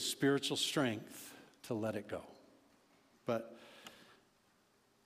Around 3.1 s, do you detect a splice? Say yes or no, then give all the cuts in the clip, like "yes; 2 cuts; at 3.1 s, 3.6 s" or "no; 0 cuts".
yes; 1 cut; at 3.1 s